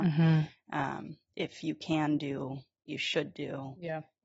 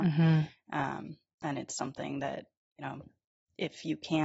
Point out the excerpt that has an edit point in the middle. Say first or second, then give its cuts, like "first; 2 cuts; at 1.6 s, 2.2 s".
first; 1 cut; at 1.3 s